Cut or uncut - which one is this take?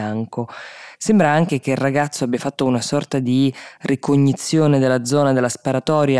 uncut